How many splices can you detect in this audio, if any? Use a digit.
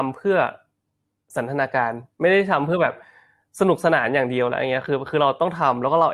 0